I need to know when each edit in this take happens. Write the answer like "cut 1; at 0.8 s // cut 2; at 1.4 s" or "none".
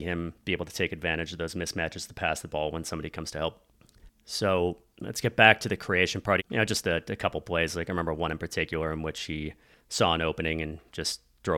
cut 1; at 6.4 s

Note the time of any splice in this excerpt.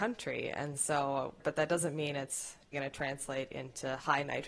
cut 1; at 1.4 s // cut 2; at 2.7 s

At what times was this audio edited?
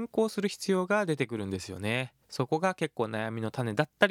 cut 1; at 2.2 s

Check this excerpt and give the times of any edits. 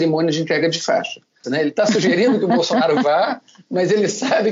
cut 1; at 1.4 s

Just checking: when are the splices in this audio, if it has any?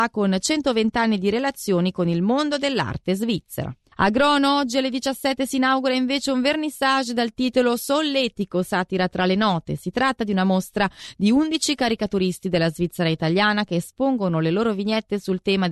cut 1; at 3.8 s

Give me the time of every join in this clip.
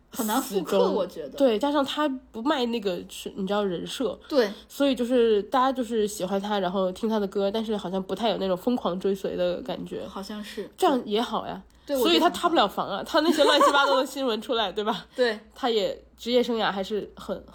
none

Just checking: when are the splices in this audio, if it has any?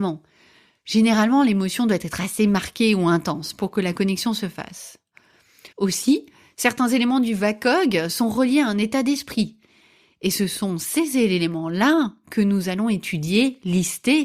cut 1; at 5.7 s

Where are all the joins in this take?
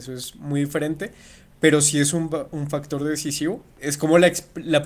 cut 1; at 3.8 s

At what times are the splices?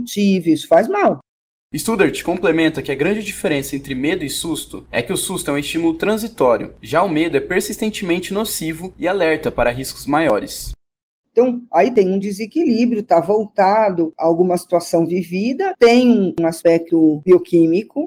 cut 1; at 11.2 s

